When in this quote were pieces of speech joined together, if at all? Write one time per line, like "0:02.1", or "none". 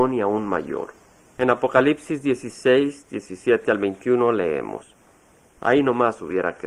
0:01.4
0:05.6